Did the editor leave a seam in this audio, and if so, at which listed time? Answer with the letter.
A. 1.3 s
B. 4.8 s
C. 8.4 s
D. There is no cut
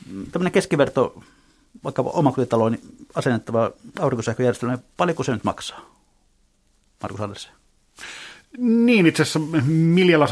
D